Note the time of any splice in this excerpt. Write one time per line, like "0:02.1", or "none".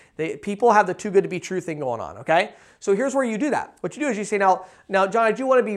none